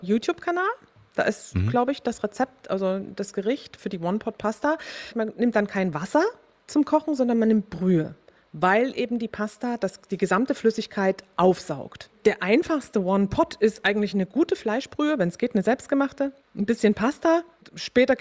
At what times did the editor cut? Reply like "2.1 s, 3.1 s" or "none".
none